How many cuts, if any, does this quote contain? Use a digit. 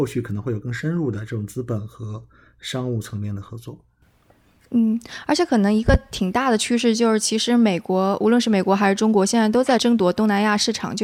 0